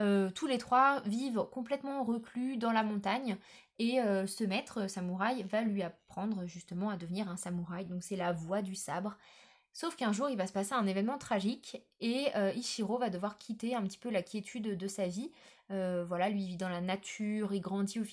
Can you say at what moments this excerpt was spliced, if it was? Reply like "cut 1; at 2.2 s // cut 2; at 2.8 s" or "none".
none